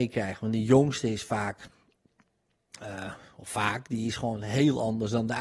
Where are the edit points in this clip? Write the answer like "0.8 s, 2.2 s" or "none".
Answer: none